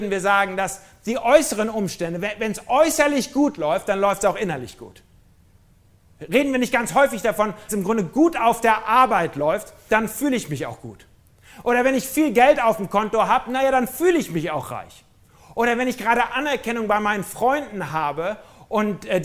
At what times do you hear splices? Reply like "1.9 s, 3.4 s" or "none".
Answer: 7.7 s, 9.9 s